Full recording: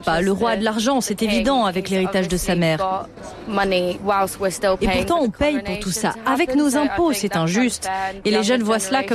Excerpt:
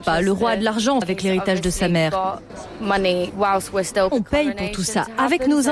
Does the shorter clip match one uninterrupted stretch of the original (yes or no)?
no